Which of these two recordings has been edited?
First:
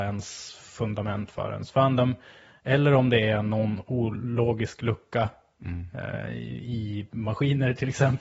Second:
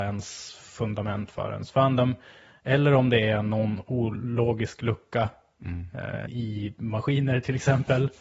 second; 1 cut; at 6.3 s

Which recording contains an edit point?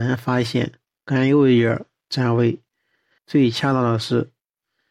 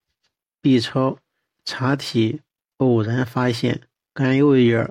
first; 1 cut; at 3.2 s

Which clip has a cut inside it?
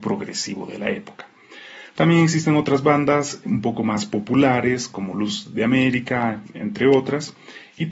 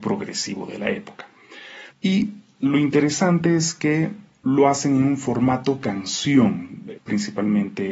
second; 2 cuts; at 1.9 s, 6.9 s

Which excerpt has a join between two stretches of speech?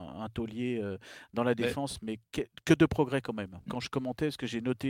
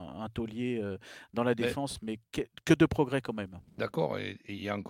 first; 1 cut; at 3.7 s

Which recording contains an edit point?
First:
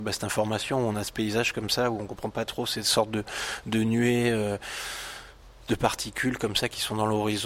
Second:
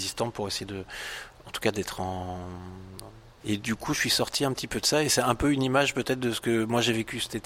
second; 1 cut; at 3.4 s

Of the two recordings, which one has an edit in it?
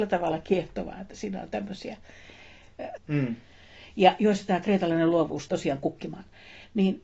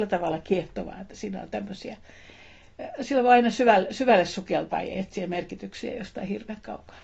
first; 2 cuts; at 3.0 s, 5.5 s

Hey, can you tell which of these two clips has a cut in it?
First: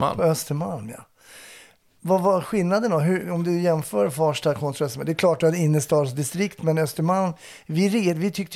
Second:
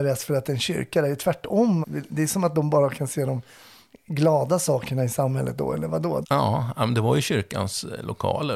second; 2 cuts; at 1.8 s, 6.2 s

